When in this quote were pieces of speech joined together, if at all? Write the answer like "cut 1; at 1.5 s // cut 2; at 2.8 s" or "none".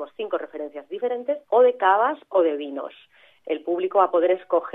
cut 1; at 1.4 s